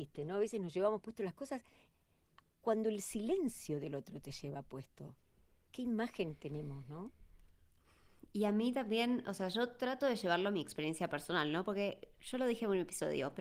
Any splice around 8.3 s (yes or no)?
no